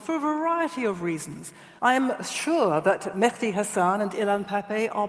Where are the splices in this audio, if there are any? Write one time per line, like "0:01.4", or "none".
0:01.8